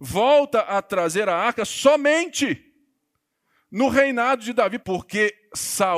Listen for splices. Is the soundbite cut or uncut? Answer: cut